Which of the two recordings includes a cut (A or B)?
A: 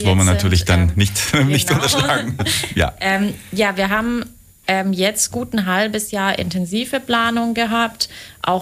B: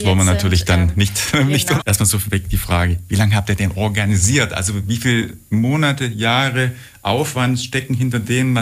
B